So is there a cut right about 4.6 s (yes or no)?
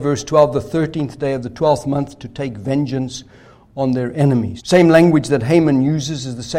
yes